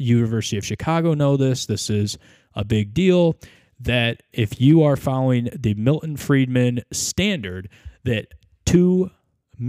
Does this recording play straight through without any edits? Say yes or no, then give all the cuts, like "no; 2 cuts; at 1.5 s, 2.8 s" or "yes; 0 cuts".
yes; 0 cuts